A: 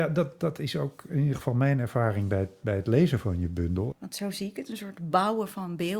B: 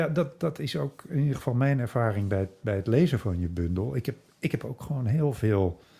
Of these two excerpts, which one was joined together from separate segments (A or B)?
A